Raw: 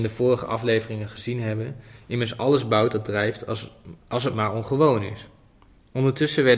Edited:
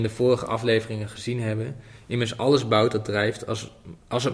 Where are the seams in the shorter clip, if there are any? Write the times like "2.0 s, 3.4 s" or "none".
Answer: none